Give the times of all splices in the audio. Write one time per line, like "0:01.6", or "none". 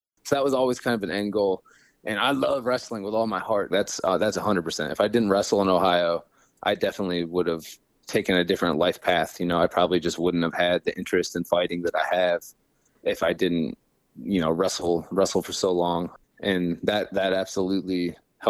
0:03.7